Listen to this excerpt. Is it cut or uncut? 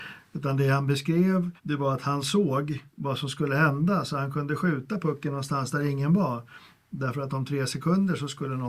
cut